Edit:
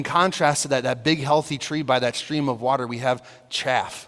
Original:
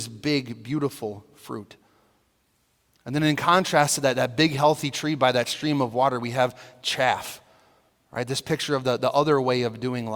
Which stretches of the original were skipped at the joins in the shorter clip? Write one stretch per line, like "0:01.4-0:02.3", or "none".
none